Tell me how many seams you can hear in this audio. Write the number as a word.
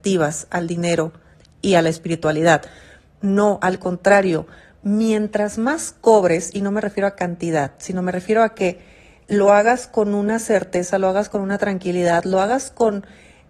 one